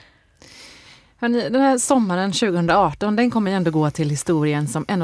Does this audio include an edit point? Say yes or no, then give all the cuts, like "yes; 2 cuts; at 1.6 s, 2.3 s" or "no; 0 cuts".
no; 0 cuts